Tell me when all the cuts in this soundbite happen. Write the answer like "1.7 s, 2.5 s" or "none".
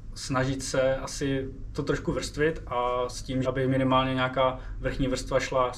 3.4 s